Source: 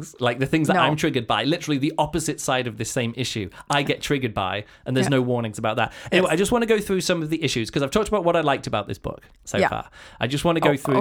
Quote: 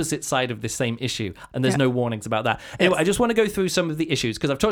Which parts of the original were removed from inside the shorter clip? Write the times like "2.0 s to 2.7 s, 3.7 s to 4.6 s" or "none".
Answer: 3.6 s to 4.8 s